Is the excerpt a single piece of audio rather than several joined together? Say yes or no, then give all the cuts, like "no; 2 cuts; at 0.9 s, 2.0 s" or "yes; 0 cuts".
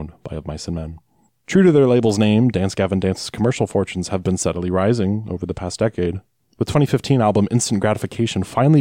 no; 1 cut; at 1.3 s